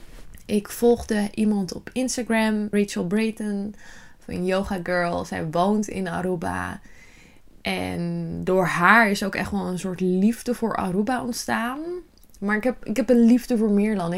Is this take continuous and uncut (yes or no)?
no